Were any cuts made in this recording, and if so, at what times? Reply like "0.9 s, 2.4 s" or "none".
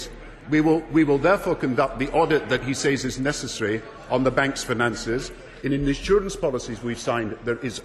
5.6 s